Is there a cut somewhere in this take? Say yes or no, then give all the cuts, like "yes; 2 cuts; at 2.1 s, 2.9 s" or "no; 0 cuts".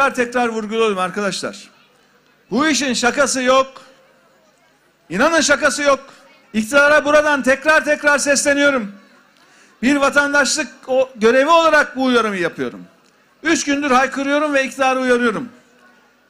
yes; 2 cuts; at 6.4 s, 13.3 s